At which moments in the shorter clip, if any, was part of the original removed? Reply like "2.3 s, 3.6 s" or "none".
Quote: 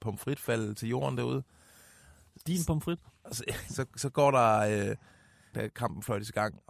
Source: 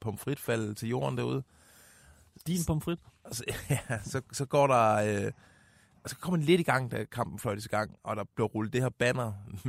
3.7 s, 5.5 s